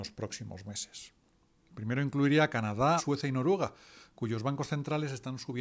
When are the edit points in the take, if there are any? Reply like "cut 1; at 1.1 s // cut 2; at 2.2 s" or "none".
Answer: cut 1; at 1.6 s // cut 2; at 3.0 s